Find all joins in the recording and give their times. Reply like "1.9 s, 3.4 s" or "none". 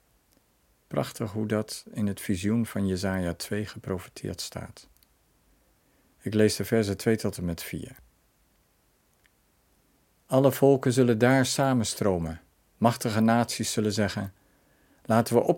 none